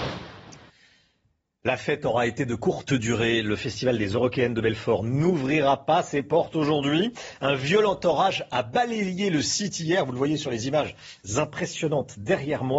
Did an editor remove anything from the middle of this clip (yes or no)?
no